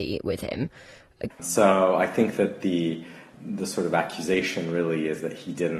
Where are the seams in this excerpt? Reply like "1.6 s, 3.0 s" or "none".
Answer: 1.3 s